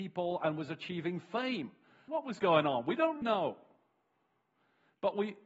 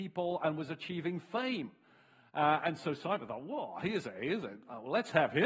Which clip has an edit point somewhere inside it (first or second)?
first